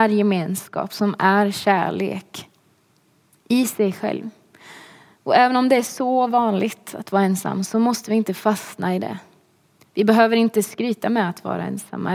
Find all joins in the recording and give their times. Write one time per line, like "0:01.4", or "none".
none